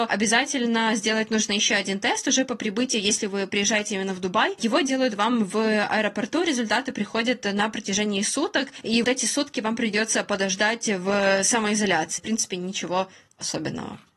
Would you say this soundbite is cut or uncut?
cut